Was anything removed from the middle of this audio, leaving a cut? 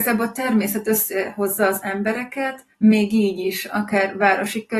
yes; 1 cut; at 2.7 s

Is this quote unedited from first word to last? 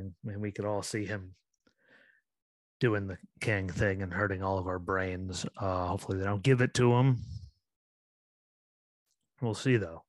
yes; 0 cuts

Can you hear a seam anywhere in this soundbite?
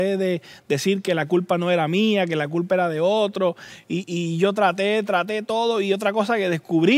no; 0 cuts

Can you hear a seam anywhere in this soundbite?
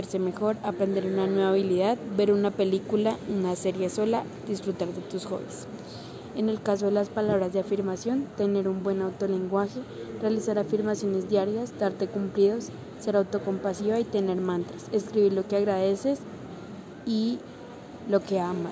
no; 0 cuts

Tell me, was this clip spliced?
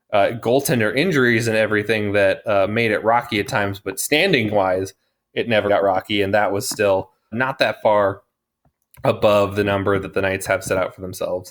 yes; 2 cuts; at 5.7 s, 7.3 s

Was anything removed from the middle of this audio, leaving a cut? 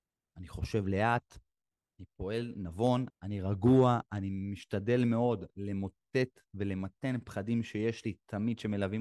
yes; 1 cut; at 3.1 s

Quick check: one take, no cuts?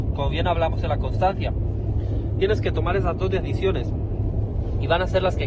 yes; 0 cuts

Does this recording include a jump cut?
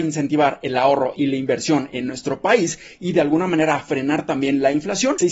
no; 0 cuts

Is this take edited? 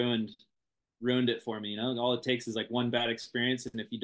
no; 0 cuts

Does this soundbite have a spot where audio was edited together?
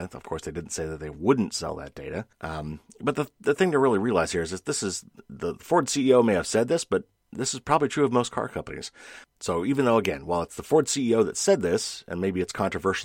yes; 2 cuts; at 2.3 s, 9.2 s

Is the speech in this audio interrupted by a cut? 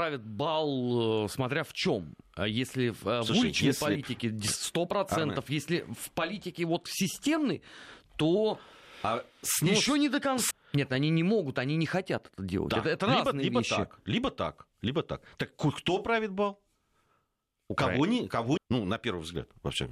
yes; 2 cuts; at 10.5 s, 18.6 s

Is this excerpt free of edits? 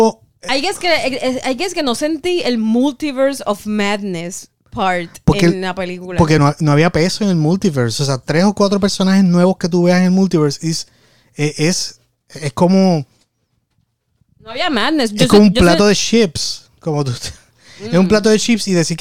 yes; 0 cuts

